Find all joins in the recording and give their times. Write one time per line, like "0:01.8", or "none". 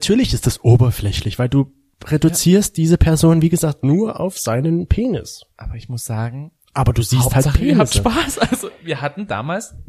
none